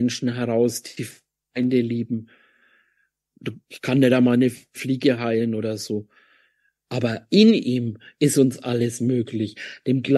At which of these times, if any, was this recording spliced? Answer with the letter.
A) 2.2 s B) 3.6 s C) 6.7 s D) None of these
B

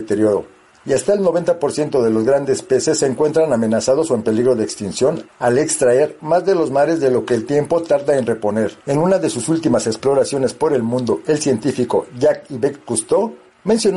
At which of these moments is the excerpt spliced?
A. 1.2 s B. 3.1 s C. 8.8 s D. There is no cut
C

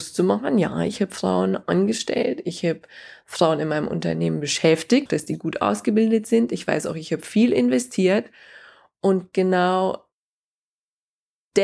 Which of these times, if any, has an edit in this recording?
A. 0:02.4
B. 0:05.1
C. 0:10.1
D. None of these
B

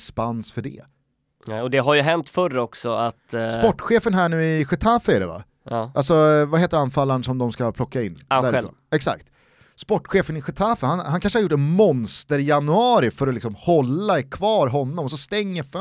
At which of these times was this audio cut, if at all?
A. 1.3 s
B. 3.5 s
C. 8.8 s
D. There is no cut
D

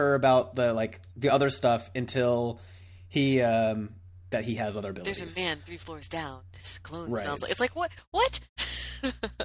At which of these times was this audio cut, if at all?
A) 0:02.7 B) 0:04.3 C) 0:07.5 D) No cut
B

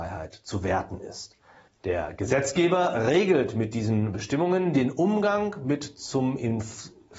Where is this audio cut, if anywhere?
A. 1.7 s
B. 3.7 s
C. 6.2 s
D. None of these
A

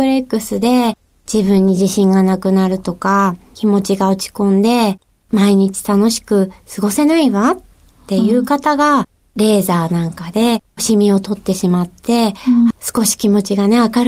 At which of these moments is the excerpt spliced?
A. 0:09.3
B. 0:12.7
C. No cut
B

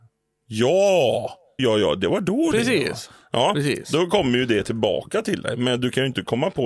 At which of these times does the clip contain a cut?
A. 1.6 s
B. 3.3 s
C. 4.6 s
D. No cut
A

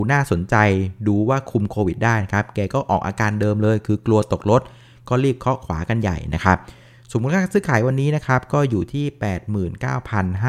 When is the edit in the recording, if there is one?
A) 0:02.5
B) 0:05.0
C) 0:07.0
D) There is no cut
D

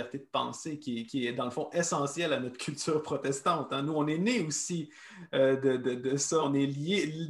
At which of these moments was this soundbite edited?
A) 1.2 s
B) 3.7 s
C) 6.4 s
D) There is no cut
C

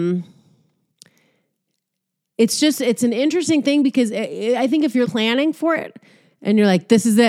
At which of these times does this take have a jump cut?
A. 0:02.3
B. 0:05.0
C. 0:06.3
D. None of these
B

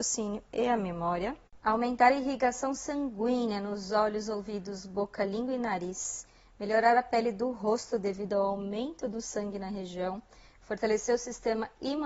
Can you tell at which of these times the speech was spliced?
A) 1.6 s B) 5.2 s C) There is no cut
C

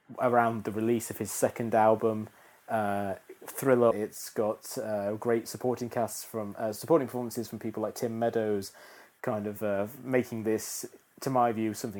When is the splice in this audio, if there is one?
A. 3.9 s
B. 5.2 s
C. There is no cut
A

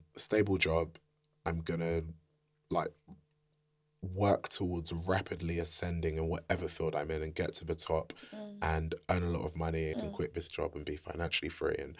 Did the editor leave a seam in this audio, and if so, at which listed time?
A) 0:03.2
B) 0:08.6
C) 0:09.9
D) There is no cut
C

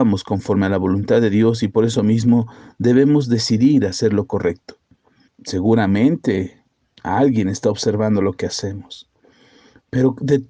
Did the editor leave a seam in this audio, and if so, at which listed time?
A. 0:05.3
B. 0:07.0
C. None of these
A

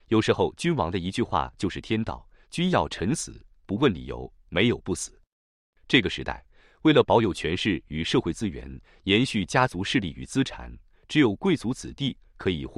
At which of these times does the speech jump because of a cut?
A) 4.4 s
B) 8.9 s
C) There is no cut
C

